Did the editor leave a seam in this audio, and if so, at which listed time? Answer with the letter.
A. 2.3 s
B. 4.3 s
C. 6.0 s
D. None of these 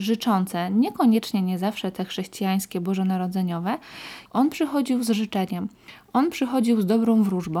B